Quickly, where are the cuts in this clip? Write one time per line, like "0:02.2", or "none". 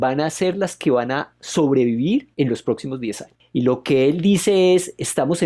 0:03.4